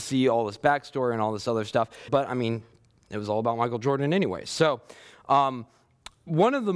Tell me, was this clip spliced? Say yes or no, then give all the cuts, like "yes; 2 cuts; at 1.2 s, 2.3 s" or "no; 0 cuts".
yes; 1 cut; at 2.1 s